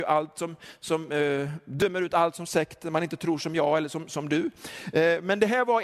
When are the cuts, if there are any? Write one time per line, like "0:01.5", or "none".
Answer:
none